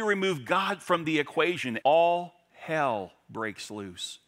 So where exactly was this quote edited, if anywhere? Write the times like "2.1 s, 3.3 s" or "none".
1.8 s